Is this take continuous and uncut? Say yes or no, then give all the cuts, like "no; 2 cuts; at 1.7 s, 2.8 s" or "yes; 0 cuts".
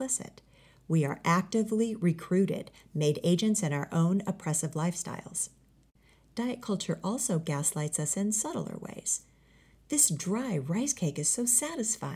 yes; 0 cuts